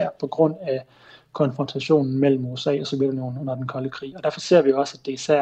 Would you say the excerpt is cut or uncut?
uncut